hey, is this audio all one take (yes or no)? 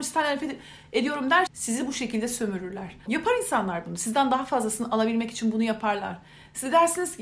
no